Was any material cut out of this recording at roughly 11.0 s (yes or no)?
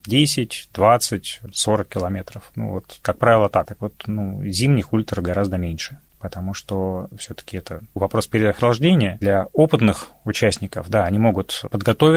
no